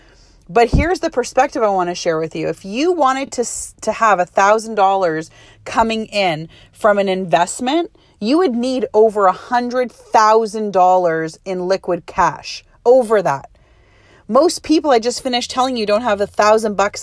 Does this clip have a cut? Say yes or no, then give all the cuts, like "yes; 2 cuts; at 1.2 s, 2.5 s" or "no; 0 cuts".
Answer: no; 0 cuts